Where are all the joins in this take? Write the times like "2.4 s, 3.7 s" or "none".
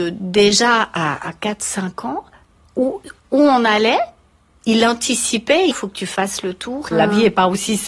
3.2 s, 5.7 s, 6.9 s

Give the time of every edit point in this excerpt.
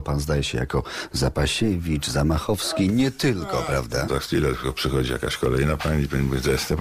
4.1 s

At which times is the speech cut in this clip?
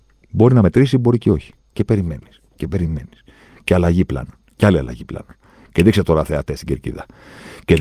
1.7 s

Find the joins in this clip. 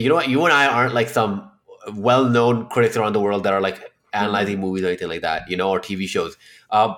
none

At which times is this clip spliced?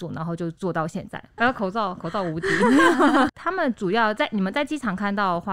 1.4 s, 3.3 s

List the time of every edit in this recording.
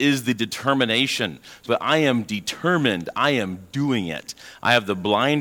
1.6 s

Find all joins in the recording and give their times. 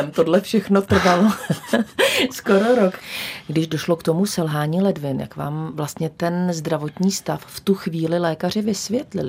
none

